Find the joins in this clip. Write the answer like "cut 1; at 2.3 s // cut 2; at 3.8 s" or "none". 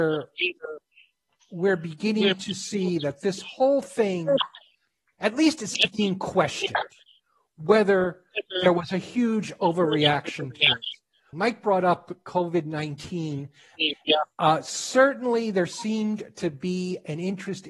cut 1; at 11.3 s // cut 2; at 13.9 s